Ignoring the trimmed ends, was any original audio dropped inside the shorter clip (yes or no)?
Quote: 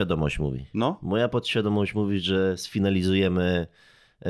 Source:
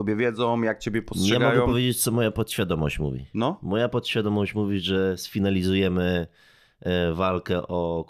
no